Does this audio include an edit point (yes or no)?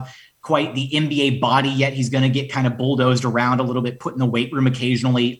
no